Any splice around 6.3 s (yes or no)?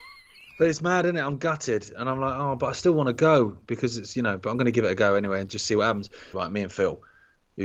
yes